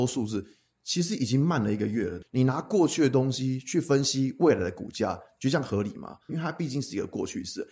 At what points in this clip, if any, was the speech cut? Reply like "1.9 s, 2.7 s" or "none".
2.2 s, 6.3 s